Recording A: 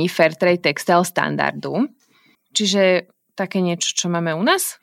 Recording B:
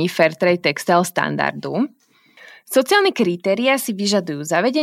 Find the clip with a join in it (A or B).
A